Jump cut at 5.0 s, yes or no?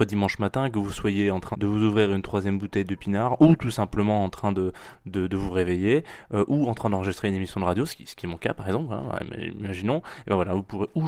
no